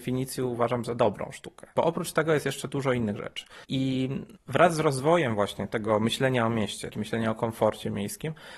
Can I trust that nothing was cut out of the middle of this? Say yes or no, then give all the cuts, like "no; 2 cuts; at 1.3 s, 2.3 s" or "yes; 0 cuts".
no; 1 cut; at 6.9 s